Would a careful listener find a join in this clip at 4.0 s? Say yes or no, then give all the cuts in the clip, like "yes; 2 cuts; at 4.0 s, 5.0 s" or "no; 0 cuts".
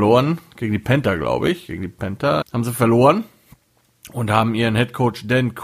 no; 1 cut; at 2.4 s